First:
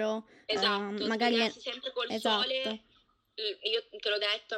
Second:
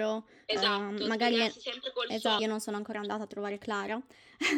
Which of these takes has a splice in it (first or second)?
second